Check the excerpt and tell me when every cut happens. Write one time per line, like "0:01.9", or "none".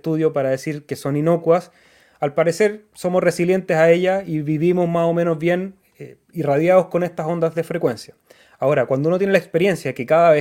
none